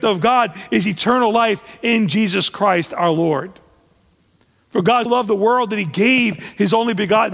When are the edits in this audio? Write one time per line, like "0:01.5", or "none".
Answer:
0:05.1